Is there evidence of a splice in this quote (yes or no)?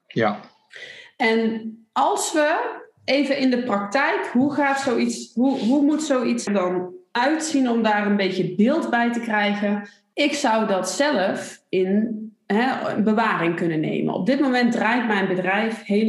yes